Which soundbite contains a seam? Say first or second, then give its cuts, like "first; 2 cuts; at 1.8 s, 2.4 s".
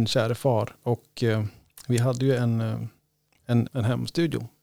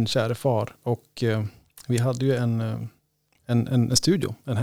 first; 1 cut; at 3.7 s